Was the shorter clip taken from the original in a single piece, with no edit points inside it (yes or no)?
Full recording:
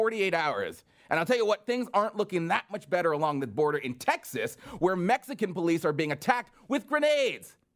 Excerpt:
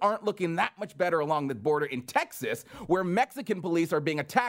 yes